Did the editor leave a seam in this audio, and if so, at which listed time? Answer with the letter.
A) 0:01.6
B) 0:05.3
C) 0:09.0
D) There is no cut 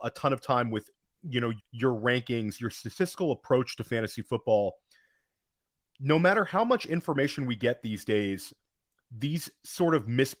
A